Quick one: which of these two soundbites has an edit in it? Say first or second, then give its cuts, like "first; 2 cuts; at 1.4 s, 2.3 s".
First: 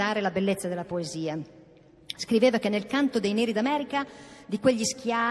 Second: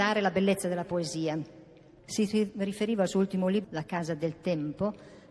second; 2 cuts; at 2.0 s, 3.6 s